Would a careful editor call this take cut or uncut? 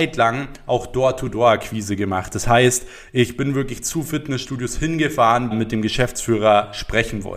cut